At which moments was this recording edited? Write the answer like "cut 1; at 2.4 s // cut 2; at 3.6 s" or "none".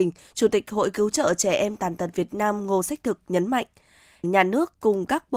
cut 1; at 4.2 s